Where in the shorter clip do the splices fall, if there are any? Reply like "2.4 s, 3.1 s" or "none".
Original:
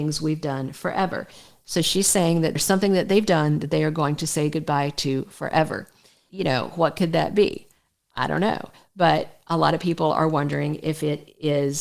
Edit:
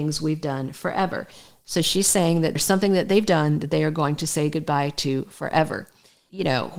none